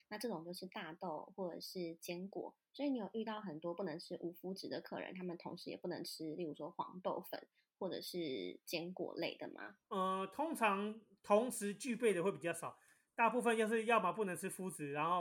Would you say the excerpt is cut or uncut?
cut